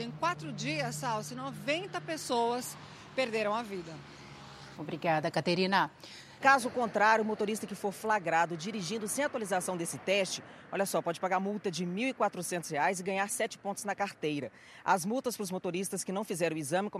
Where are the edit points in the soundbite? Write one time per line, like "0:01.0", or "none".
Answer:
0:04.7
0:06.4